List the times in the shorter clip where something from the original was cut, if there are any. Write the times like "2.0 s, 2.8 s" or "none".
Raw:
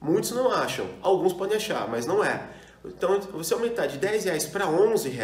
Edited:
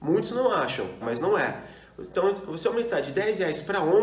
1.0 s